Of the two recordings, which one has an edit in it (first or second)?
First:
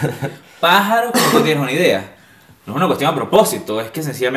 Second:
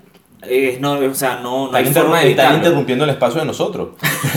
second